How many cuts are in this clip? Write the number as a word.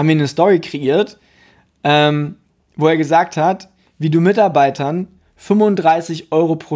zero